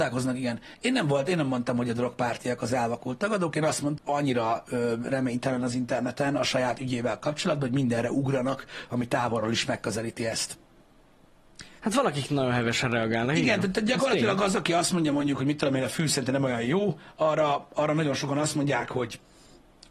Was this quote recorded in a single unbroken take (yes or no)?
no